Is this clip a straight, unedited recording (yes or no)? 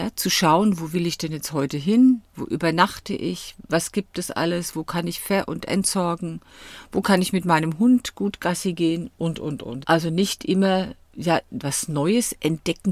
no